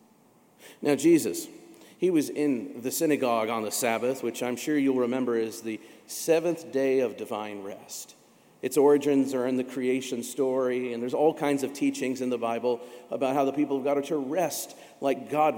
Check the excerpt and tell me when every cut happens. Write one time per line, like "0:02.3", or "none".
none

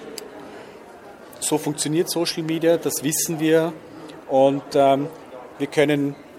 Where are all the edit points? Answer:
none

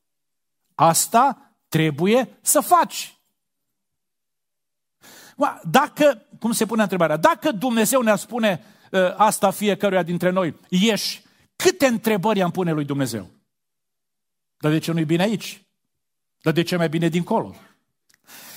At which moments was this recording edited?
none

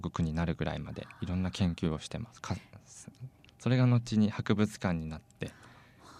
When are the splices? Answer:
0:03.5

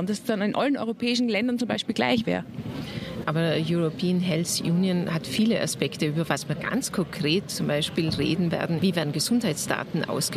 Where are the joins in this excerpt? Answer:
0:03.2
0:08.8

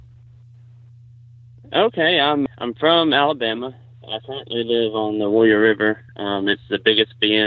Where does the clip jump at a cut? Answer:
0:02.5
0:06.1

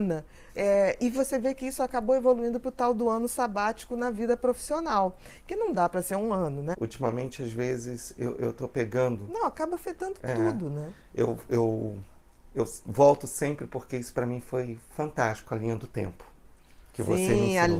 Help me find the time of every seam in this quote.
0:06.7

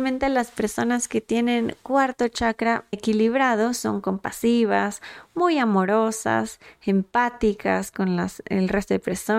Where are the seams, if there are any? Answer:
0:02.9

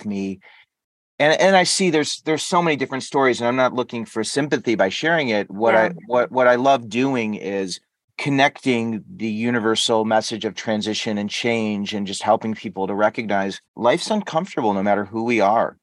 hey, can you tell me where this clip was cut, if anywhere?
0:08.1
0:13.7

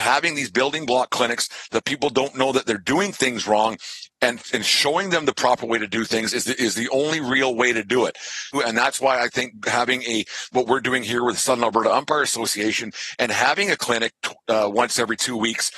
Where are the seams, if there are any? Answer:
0:08.5

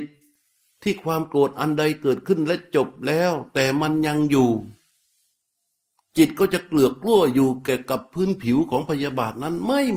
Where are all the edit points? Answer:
none

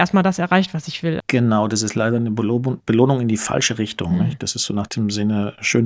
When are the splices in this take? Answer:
0:01.2

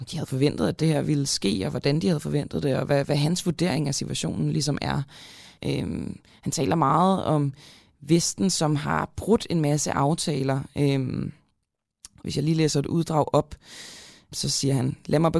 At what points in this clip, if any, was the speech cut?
0:05.6
0:12.2
0:14.3

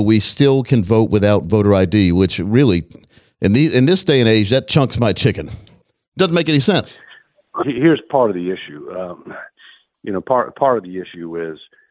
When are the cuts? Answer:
0:07.6

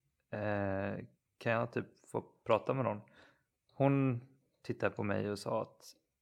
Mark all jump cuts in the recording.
none

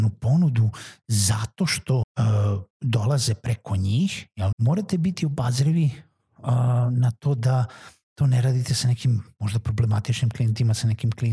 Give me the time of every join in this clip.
0:02.0
0:04.5

